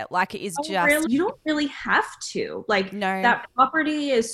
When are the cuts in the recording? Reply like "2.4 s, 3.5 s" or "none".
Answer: 1.1 s